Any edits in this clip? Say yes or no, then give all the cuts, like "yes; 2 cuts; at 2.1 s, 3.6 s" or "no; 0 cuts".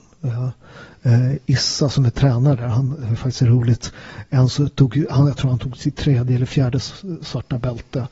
no; 0 cuts